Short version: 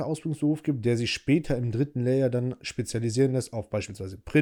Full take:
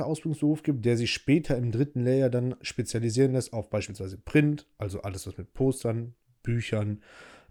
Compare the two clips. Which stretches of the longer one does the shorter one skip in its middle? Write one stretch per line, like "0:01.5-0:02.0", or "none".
none

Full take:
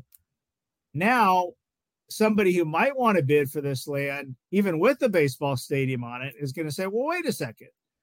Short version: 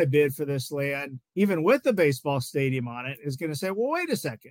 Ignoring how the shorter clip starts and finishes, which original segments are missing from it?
none

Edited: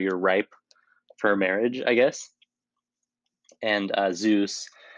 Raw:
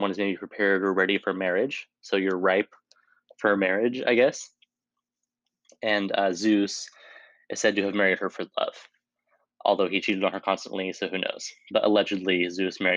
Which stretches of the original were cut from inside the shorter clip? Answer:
none

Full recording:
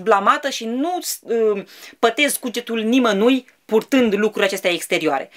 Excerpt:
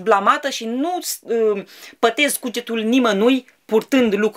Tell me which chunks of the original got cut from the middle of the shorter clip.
none

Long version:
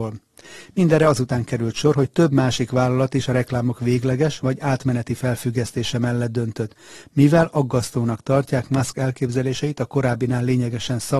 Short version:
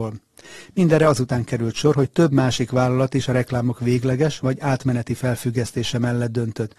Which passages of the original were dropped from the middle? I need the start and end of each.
none

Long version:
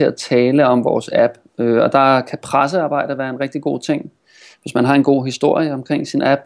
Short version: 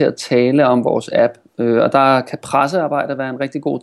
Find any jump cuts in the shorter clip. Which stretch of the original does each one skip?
none

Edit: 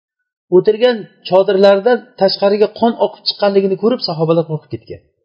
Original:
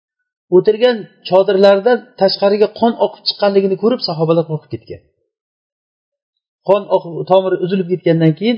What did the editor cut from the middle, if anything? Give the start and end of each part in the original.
none

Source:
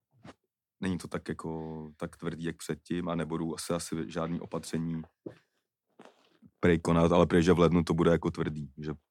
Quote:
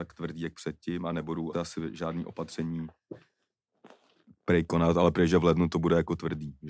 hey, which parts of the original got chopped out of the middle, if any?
0:03.6-0:03.7

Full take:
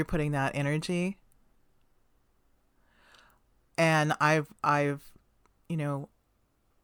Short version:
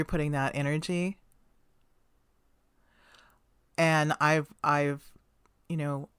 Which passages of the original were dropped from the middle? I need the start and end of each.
none

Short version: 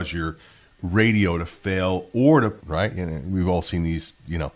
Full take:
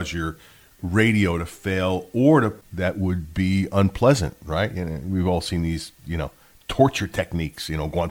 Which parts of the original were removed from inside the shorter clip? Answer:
0:02.6-0:04.4

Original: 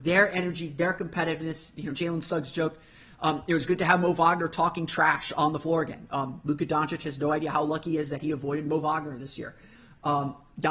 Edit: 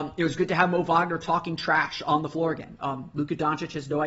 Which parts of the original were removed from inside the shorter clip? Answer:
none

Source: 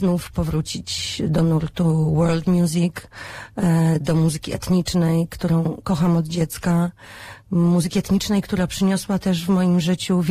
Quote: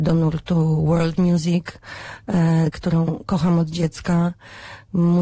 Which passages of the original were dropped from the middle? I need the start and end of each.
0:04.0-0:05.3

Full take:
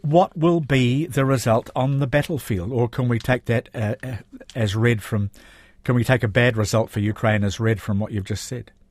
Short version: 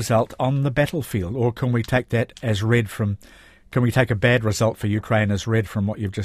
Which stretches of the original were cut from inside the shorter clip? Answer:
0:03.7-0:04.5

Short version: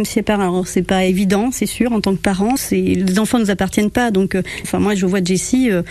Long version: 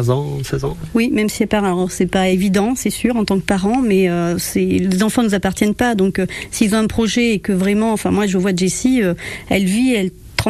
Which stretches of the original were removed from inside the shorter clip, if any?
0:03.8-0:04.4
0:06.5-0:08.0

